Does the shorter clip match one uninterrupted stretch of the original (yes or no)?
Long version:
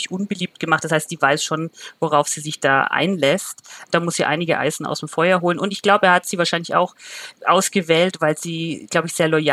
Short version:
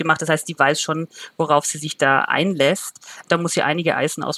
yes